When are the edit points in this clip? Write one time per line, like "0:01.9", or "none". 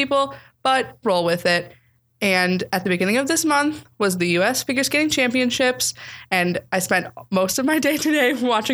0:01.0